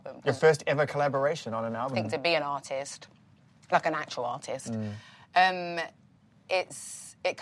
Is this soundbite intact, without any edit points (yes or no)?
no